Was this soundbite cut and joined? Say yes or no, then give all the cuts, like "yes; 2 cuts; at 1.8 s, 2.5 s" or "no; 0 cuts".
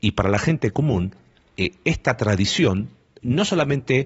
no; 0 cuts